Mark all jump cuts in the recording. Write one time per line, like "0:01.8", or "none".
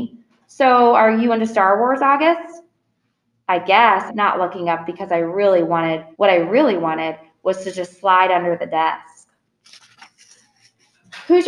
0:04.1
0:06.1